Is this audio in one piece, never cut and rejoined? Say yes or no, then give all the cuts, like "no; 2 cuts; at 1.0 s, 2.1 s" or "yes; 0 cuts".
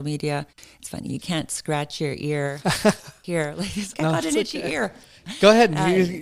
no; 1 cut; at 3.9 s